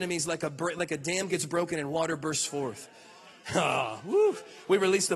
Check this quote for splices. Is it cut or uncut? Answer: uncut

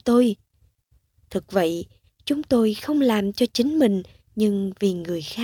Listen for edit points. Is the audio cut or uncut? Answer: uncut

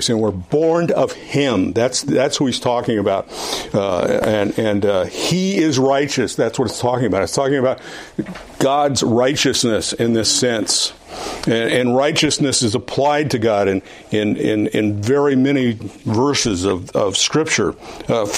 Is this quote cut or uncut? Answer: cut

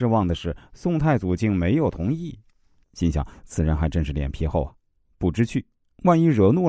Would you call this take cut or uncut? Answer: cut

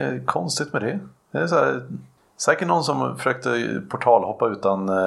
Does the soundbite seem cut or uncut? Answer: uncut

